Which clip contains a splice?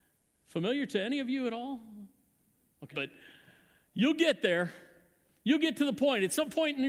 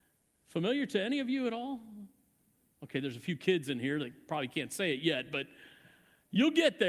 first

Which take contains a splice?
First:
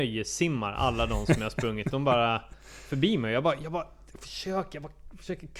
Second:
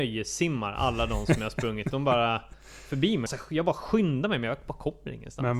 second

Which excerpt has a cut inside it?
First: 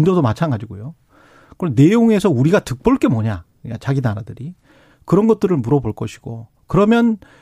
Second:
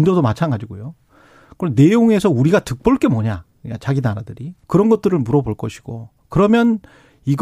second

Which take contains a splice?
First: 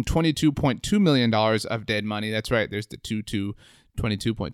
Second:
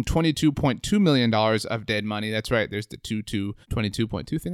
second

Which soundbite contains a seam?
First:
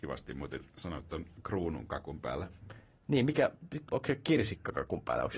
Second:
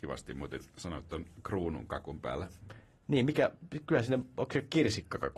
first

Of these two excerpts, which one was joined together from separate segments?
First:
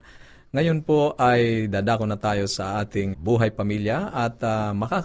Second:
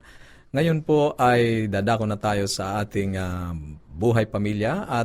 first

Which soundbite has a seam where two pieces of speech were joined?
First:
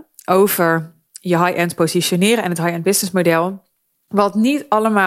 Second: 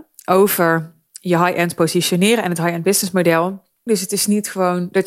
second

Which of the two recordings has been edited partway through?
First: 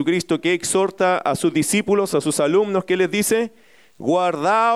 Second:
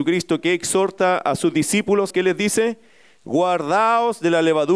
second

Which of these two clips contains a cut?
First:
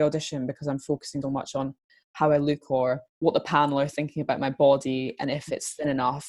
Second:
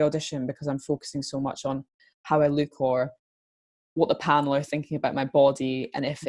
first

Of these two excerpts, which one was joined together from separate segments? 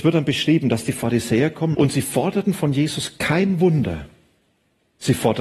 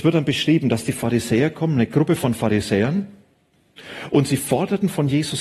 first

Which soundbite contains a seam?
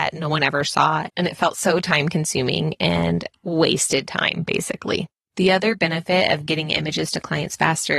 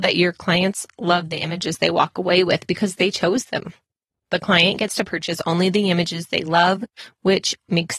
first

